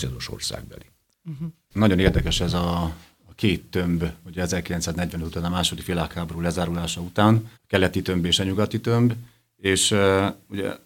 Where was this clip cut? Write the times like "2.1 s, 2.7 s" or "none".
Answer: 1.7 s, 7.5 s